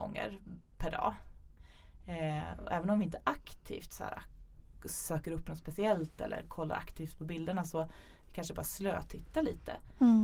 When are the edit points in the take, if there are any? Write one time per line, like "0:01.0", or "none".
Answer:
none